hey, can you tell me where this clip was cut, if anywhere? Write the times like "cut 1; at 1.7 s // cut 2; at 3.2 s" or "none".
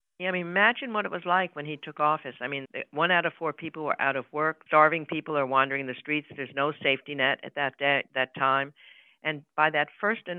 cut 1; at 2.7 s // cut 2; at 4.7 s